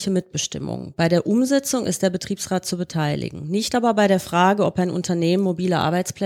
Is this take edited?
no; 0 cuts

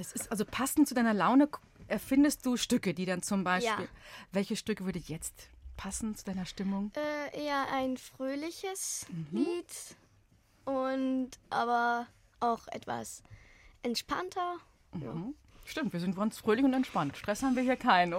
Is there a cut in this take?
no; 0 cuts

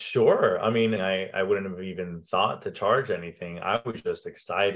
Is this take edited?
yes; 1 cut; at 1.0 s

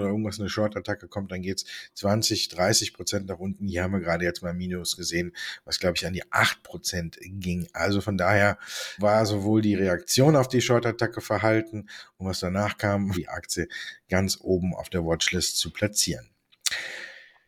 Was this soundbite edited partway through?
yes; 2 cuts; at 9.0 s, 13.1 s

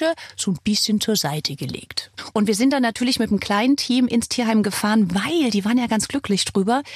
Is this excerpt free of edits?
no; 1 cut; at 2.3 s

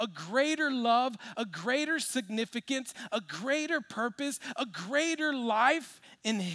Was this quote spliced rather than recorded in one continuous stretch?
no; 0 cuts

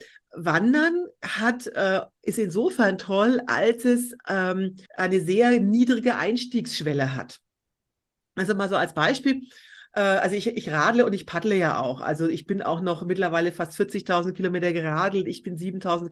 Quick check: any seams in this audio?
yes; 1 cut; at 4.9 s

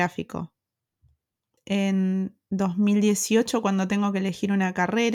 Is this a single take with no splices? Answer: no; 1 cut; at 1.6 s

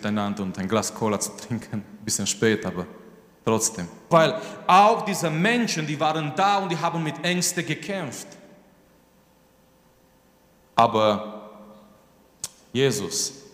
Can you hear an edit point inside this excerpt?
yes; 1 cut; at 4.1 s

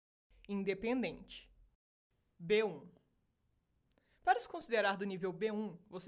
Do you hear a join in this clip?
no; 0 cuts

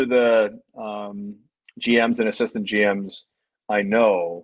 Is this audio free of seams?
yes; 0 cuts

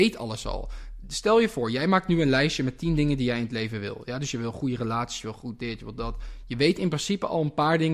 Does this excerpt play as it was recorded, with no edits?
yes; 0 cuts

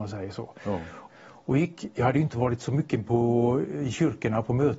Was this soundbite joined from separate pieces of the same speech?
yes; 1 cut; at 1.1 s

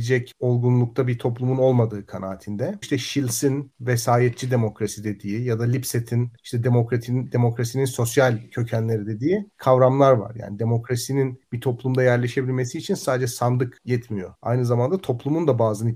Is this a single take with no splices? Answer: no; 1 cut; at 2.8 s

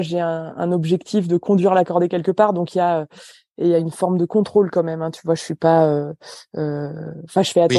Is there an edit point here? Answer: no; 0 cuts

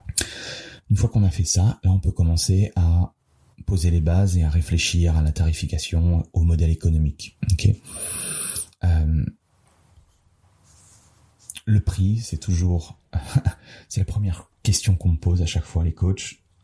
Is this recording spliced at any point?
yes; 1 cut; at 1.8 s

